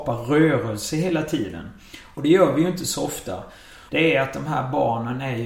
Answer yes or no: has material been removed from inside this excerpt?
yes